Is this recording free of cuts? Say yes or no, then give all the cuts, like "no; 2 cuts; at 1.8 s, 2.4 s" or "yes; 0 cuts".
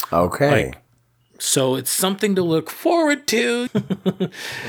no; 1 cut; at 3.7 s